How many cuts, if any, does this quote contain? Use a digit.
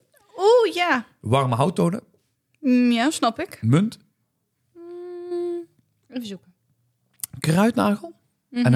0